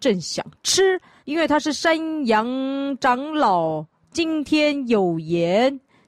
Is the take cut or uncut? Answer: cut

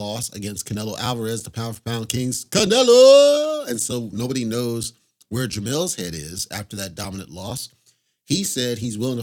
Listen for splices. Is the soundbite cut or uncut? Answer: uncut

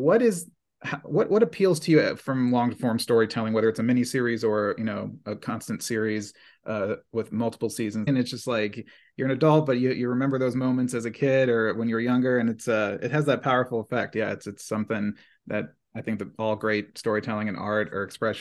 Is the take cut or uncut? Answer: cut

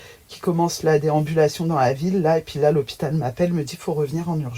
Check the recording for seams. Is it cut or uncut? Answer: uncut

